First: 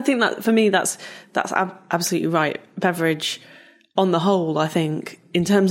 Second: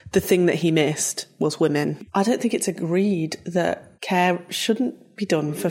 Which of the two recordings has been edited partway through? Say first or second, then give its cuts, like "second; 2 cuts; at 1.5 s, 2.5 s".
second; 2 cuts; at 2.1 s, 3.9 s